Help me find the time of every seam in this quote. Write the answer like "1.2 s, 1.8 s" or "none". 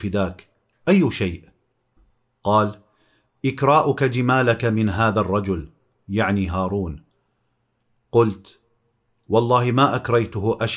none